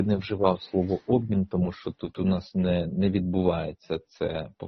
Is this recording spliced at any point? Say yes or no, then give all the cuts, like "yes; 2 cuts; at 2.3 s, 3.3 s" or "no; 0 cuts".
no; 0 cuts